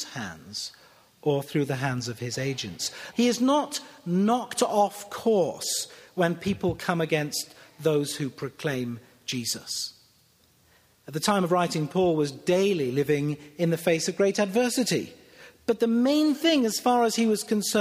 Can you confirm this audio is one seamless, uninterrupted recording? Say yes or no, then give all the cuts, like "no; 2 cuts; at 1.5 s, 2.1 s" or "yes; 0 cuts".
no; 1 cut; at 3.1 s